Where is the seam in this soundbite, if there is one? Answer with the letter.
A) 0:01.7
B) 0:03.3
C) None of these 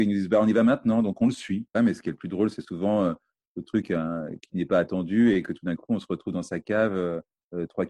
A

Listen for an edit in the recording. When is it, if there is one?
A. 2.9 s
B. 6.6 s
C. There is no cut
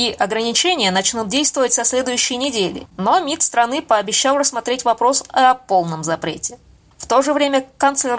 A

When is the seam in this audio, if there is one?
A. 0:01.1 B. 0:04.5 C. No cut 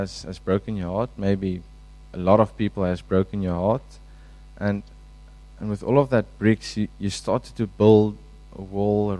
C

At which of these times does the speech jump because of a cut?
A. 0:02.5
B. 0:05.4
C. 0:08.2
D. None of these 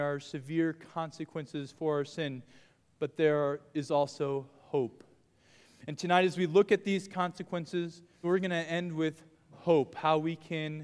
C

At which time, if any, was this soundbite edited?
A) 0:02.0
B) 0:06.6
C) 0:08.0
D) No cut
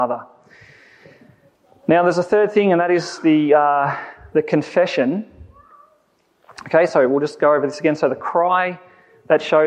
D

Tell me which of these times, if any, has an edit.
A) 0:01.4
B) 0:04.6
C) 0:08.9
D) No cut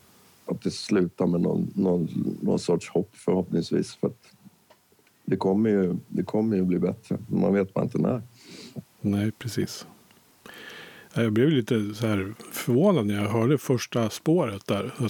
D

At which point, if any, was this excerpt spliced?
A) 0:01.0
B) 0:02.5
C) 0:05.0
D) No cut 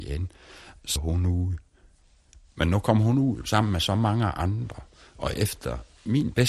A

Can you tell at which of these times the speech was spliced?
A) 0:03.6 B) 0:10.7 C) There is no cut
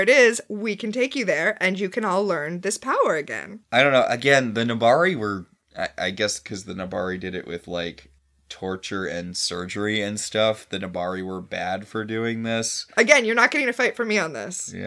A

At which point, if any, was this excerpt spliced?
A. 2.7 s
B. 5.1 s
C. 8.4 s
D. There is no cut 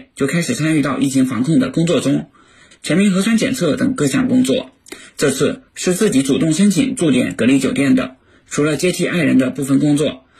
A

